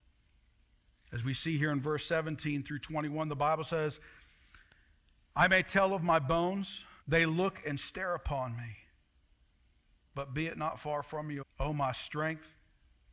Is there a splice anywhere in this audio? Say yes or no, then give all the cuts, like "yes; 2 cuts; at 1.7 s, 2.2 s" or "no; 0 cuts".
yes; 3 cuts; at 7.0 s, 10.0 s, 11.4 s